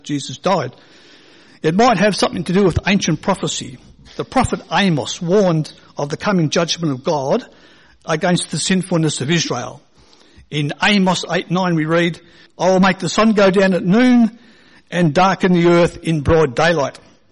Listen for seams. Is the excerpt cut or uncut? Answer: cut